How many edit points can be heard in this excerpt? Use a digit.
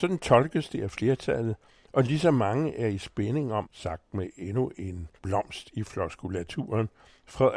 2